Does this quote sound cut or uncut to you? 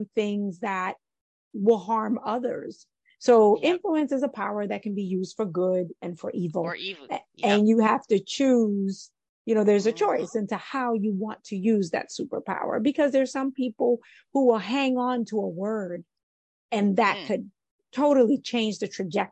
uncut